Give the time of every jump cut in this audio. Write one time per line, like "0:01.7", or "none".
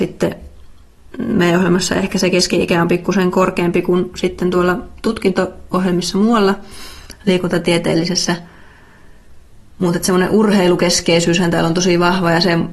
none